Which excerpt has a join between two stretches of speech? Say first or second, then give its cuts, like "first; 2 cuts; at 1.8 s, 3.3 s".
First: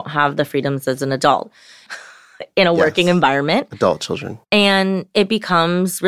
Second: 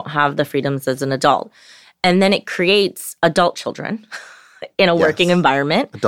first; 1 cut; at 1.9 s